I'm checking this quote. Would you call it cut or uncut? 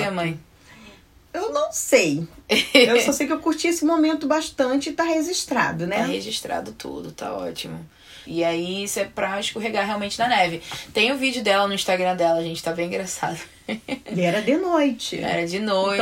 cut